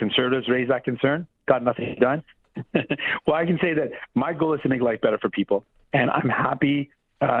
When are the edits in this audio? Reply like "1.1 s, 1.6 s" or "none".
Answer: 2.4 s

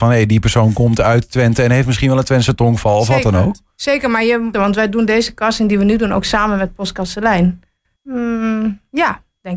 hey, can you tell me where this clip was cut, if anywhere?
4.5 s, 8.0 s

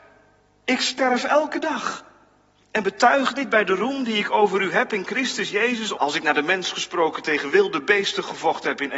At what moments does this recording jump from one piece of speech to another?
5.9 s

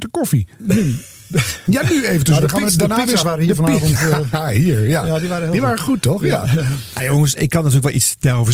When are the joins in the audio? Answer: 3.2 s, 7.4 s

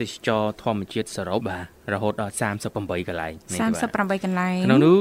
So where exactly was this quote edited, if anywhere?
1.4 s

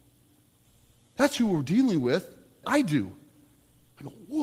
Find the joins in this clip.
2.6 s

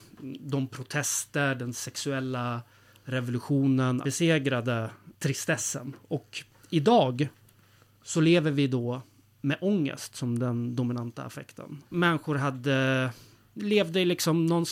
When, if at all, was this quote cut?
4.0 s, 11.8 s

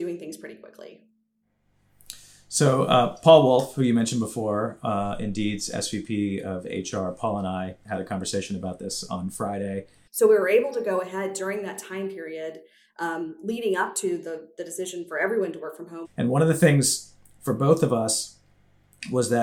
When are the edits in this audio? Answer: 10.1 s, 16.0 s

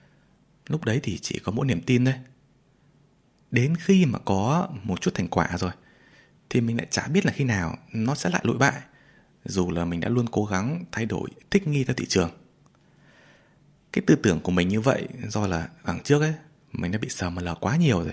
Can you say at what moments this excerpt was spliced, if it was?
none

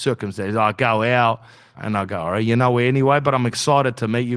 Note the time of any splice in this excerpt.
1.7 s

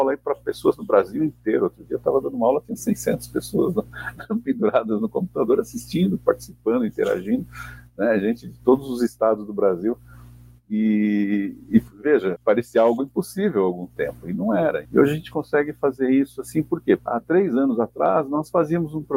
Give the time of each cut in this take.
12.3 s, 14.8 s, 17.0 s

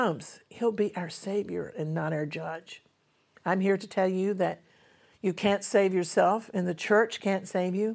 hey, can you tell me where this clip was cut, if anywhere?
none

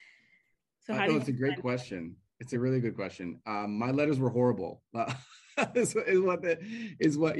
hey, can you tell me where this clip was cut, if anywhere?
none

